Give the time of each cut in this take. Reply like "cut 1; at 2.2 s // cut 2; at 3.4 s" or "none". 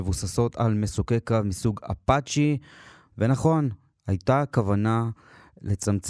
cut 1; at 3.1 s